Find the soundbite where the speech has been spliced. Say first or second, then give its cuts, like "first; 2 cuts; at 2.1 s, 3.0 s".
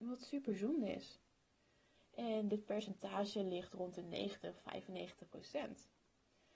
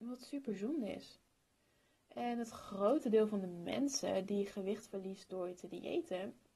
first; 1 cut; at 1.9 s